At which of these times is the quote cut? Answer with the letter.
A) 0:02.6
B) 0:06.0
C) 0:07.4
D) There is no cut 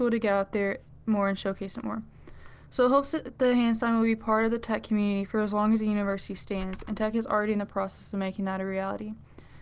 D